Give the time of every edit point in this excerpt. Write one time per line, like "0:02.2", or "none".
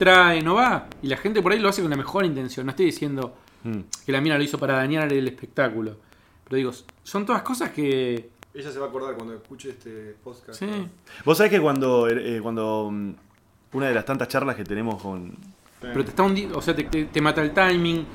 0:15.8
0:16.9